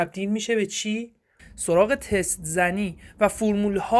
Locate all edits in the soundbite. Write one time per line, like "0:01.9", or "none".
0:01.4